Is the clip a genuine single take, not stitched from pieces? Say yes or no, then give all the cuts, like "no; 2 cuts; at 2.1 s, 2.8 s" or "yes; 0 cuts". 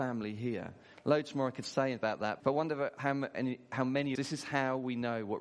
no; 2 cuts; at 2.4 s, 4.1 s